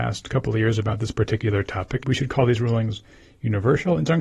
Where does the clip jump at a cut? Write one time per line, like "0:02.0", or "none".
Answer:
0:02.0